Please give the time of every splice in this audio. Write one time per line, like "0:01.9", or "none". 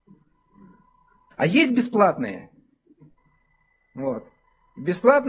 0:01.3